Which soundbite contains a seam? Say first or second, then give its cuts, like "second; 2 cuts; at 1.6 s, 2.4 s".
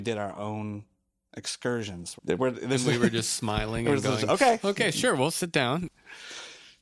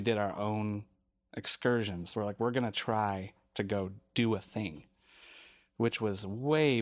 first; 1 cut; at 2.2 s